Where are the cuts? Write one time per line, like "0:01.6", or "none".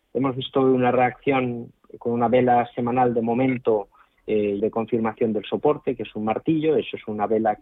0:04.6